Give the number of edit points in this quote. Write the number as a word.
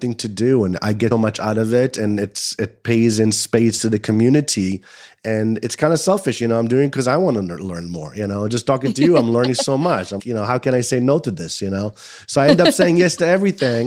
two